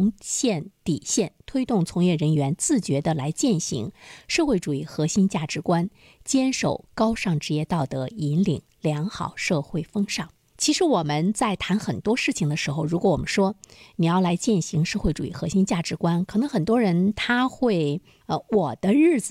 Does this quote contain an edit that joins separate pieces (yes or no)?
yes